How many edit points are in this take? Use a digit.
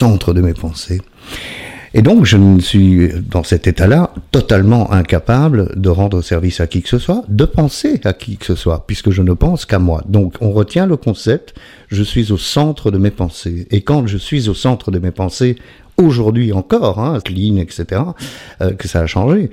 1